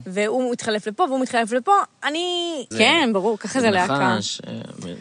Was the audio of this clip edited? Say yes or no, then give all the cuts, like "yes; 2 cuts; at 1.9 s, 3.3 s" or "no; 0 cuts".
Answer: yes; 1 cut; at 2.7 s